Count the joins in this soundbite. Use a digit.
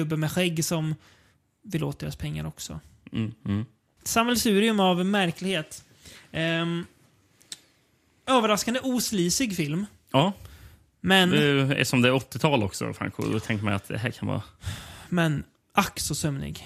1